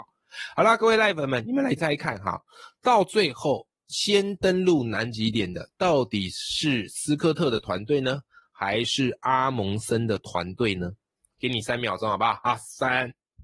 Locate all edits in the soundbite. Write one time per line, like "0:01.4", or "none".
0:01.8